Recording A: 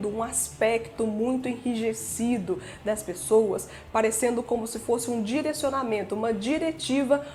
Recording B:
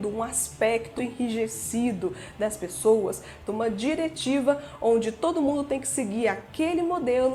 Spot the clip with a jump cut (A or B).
B